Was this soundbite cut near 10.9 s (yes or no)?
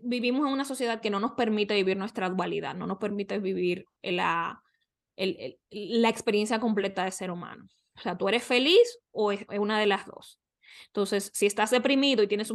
no